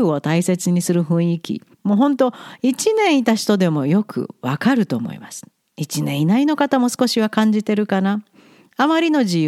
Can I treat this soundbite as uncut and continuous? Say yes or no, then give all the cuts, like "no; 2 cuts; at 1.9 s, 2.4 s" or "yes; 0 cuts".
no; 1 cut; at 1.7 s